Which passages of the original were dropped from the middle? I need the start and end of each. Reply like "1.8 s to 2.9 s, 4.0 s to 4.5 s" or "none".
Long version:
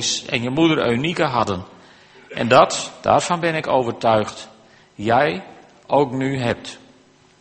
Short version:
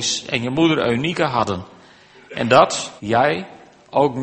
3.0 s to 4.9 s